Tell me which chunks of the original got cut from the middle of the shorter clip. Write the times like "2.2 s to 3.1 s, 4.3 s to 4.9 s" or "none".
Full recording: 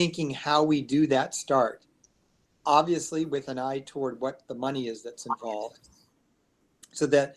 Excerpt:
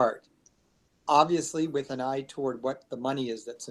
none